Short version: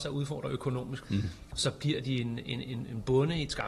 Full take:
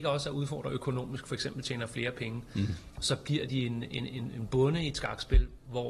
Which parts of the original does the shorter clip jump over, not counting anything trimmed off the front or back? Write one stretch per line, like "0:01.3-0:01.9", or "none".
0:01.2-0:02.5

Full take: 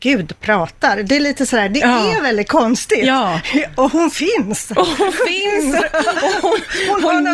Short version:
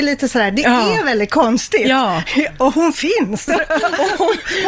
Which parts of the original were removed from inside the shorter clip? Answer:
0:04.7-0:05.7

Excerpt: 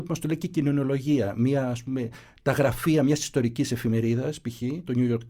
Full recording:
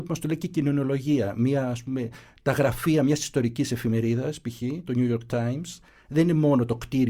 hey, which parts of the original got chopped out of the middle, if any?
none

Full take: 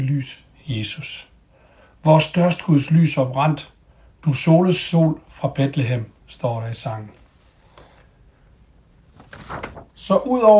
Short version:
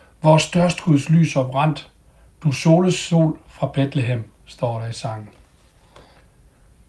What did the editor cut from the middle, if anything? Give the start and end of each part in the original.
none

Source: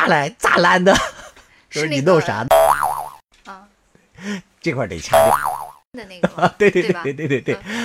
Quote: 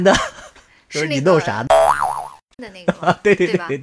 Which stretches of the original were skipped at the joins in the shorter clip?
0:03.3-0:05.9

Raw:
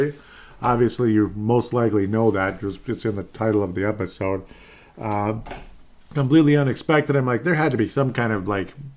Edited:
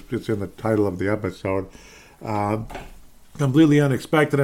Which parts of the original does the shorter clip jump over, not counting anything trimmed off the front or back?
none

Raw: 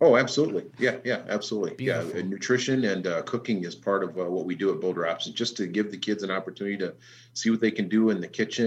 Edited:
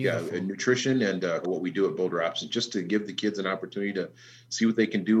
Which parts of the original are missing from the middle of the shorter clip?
0:03.2-0:04.3

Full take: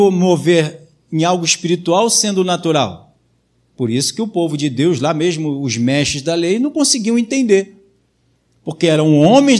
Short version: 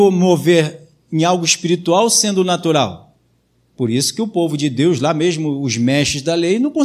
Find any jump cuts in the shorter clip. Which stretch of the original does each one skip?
none

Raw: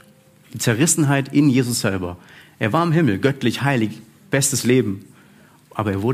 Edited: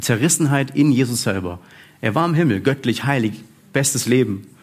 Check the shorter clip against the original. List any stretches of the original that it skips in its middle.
none

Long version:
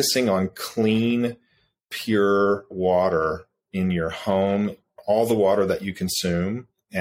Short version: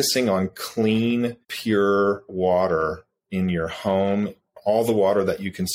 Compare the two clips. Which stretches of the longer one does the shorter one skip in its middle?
0:01.4-0:01.8

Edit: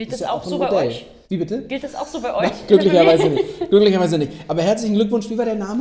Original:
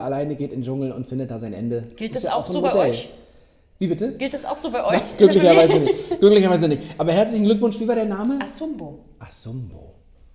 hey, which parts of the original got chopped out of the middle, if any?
0:03.3-0:03.7

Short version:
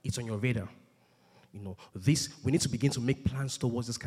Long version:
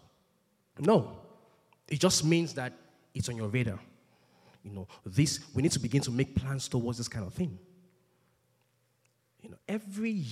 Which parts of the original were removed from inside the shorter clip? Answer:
none

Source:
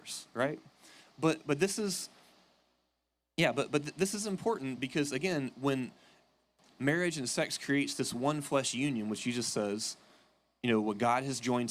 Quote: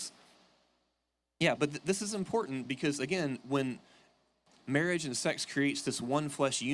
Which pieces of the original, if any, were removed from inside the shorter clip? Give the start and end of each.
0:03.5-0:03.7

